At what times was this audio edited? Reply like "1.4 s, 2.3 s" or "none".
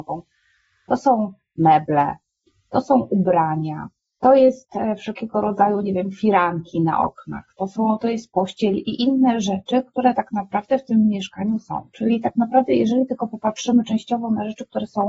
none